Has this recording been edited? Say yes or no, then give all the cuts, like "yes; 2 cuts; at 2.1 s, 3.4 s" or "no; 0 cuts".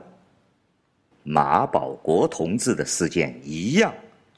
yes; 1 cut; at 1.1 s